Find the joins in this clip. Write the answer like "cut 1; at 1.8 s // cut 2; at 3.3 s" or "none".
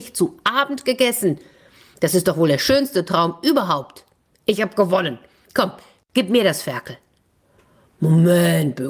none